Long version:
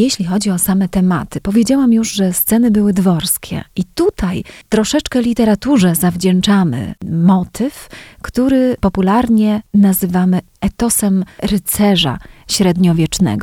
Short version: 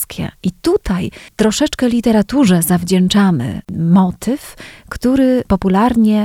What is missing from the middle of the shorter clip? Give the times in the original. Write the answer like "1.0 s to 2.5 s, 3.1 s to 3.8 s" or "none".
none